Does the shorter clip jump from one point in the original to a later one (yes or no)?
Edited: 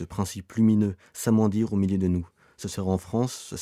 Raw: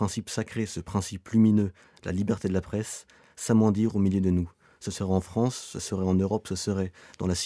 yes